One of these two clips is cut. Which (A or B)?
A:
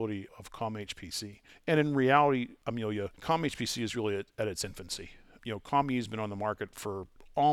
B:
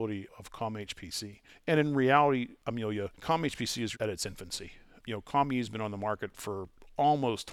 B